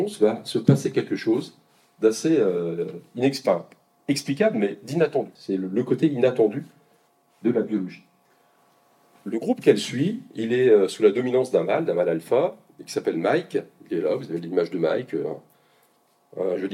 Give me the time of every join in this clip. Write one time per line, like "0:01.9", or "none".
0:05.4